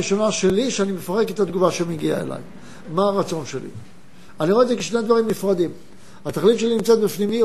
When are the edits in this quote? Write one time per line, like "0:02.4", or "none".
0:02.8

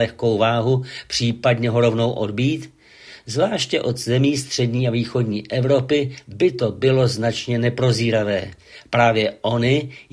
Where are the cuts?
none

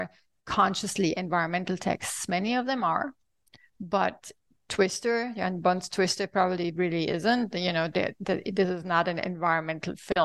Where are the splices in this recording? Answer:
none

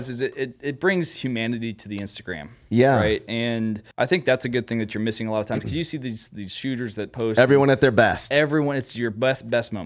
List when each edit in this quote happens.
0:03.9

